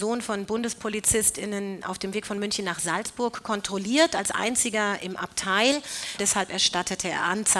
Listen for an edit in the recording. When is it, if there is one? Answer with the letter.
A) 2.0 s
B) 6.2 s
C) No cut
B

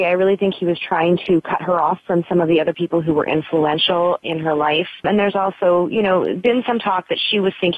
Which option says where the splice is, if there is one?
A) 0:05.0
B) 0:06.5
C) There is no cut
A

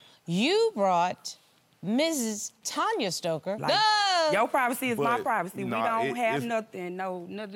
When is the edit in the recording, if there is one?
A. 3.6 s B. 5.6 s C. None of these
A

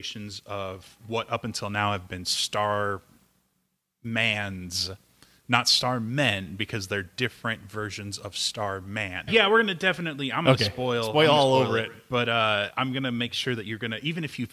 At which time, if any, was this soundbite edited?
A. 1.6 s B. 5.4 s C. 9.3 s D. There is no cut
C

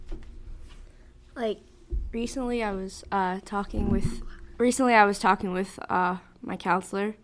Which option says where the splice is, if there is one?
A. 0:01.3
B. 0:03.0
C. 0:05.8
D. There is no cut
D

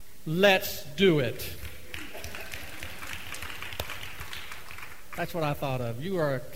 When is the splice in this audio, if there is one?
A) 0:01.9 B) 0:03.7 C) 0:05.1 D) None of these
D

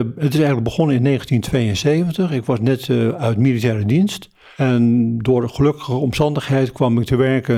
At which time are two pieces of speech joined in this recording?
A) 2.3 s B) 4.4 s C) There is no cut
C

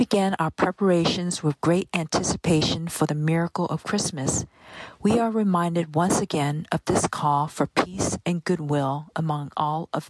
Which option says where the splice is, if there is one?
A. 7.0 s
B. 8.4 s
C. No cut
C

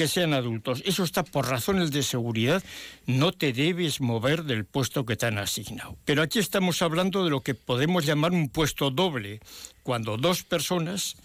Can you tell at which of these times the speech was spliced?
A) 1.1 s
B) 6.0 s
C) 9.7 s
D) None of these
B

